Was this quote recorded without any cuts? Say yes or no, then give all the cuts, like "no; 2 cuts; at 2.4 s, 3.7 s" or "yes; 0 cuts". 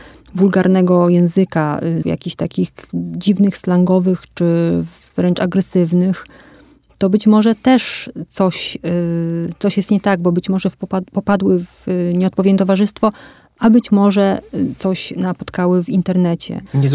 no; 1 cut; at 2.0 s